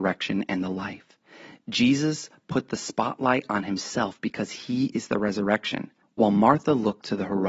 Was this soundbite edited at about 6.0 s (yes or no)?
yes